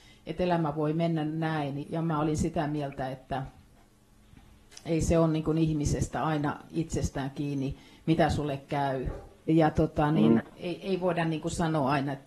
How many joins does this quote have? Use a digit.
3